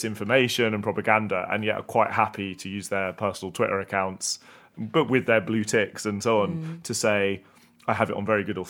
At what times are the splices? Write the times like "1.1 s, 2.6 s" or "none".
none